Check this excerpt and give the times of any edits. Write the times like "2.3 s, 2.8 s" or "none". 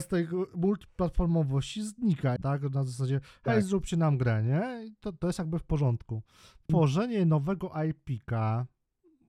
2.4 s, 6.7 s

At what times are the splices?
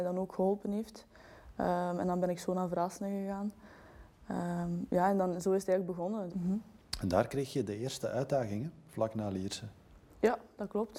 6.3 s

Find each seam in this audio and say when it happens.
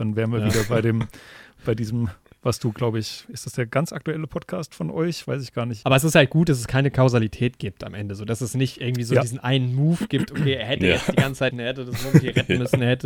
5.8 s, 11.5 s

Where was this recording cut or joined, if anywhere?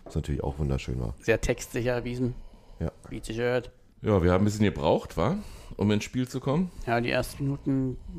1.2 s, 3.9 s

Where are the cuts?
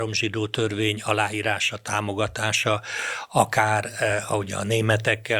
none

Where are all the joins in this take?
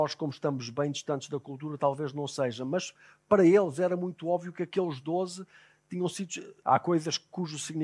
6.6 s

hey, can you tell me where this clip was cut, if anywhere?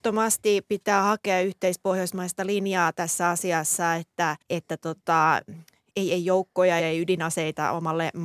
4.4 s, 6.8 s

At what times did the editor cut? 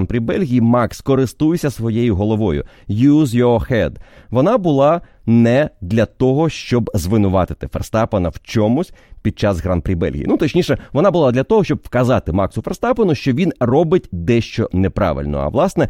none

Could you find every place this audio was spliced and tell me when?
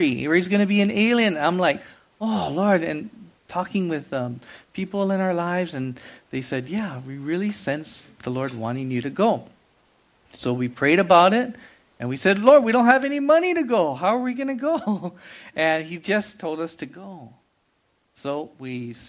none

